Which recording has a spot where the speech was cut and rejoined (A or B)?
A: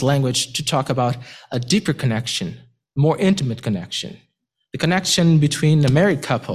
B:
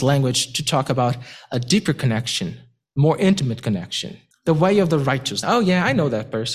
B